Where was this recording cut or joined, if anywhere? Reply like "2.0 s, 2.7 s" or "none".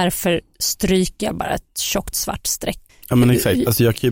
2.9 s